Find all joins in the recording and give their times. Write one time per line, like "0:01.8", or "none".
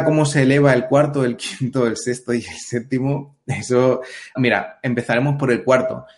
0:04.4